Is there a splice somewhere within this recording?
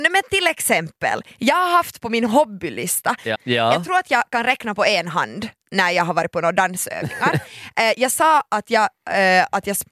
yes; 1 cut; at 3.3 s

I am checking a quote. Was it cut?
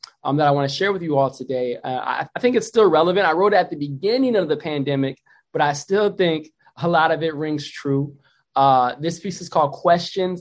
no; 0 cuts

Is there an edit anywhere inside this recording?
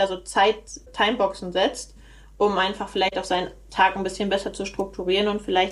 no; 0 cuts

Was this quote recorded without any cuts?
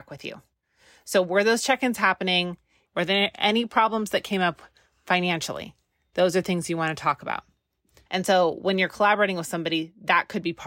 no; 2 cuts; at 2.9 s, 8.1 s

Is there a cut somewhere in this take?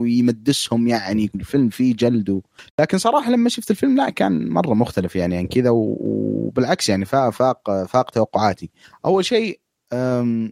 no; 0 cuts

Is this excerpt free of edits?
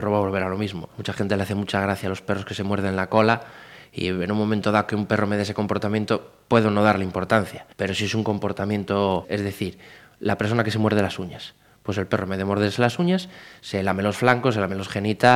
no; 3 cuts; at 0.9 s, 7.7 s, 9.2 s

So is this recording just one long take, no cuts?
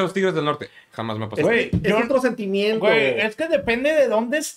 yes; 0 cuts

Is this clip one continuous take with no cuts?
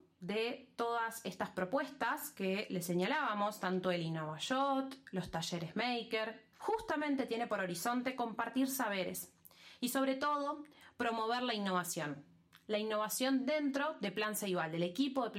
no; 1 cut; at 6.5 s

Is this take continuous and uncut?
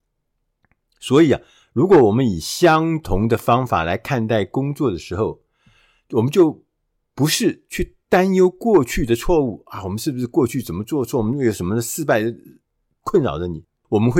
yes; 0 cuts

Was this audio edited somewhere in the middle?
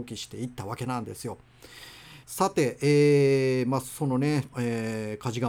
yes; 2 cuts; at 2.2 s, 4.5 s

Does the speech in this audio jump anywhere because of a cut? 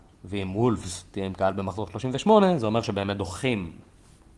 no; 0 cuts

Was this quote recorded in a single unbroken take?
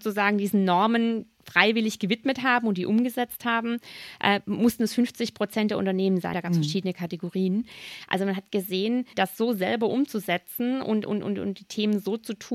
no; 2 cuts; at 6.3 s, 9.1 s

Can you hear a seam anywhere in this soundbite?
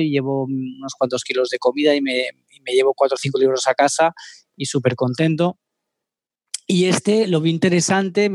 no; 0 cuts

